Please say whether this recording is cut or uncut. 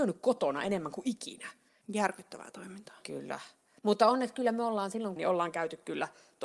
cut